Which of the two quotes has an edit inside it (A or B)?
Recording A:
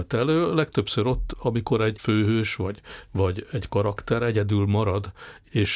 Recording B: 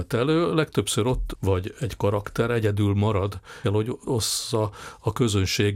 B